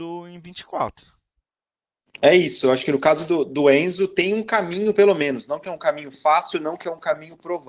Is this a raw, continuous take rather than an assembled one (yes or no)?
yes